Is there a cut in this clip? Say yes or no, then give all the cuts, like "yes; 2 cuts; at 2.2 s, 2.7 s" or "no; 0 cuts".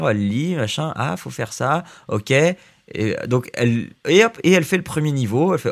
no; 0 cuts